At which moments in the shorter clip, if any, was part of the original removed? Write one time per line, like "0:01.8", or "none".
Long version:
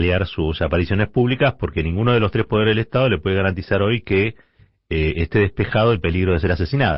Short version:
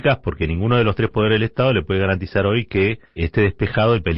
0:03.2